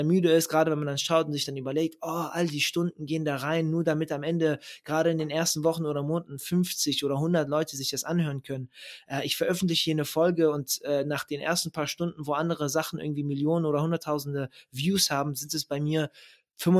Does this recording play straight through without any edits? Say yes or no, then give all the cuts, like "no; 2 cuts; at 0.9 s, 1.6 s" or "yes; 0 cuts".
yes; 0 cuts